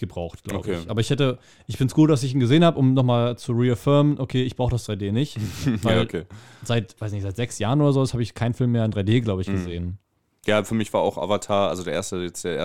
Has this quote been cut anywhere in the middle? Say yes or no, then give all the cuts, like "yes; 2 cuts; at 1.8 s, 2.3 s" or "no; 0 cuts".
no; 0 cuts